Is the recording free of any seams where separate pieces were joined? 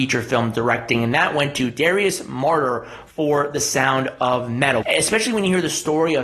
no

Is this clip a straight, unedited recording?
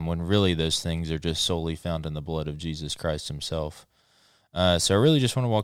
yes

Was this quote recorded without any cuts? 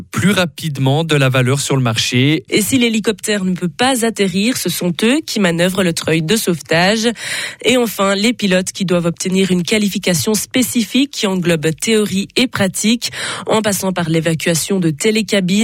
no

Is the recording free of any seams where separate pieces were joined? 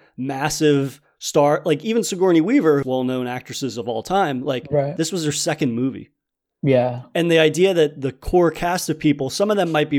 no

